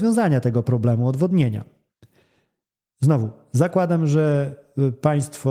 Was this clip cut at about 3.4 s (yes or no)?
no